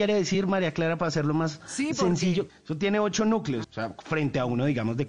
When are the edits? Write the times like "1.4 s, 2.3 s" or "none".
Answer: 2.5 s, 3.6 s